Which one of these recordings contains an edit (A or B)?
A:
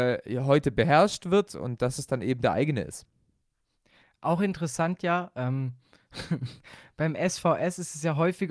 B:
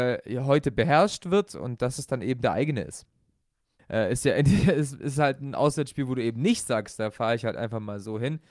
B